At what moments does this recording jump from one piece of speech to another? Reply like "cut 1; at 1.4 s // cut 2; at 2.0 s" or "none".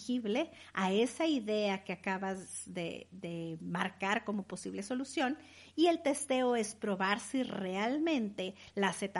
none